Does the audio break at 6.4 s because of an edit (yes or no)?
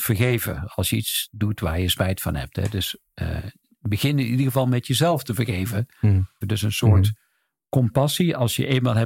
yes